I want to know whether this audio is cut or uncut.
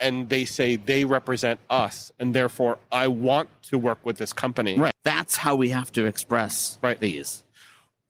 cut